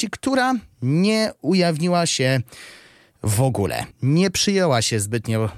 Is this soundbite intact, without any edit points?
no; 1 cut; at 3.9 s

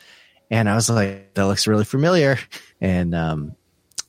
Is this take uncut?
no; 2 cuts; at 1.3 s, 2.7 s

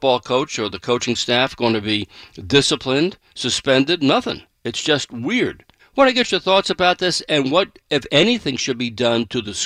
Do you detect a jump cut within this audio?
yes; 1 cut; at 5.8 s

